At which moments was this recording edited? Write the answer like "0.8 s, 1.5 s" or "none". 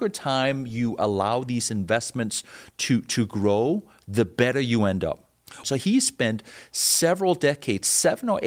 5.6 s